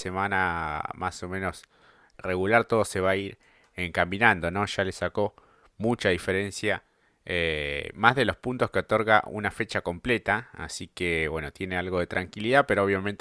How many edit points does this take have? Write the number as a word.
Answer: one